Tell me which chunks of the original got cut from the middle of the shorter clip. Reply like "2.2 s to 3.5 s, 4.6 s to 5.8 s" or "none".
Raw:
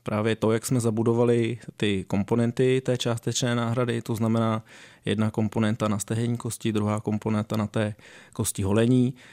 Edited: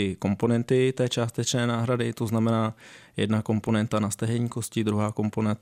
none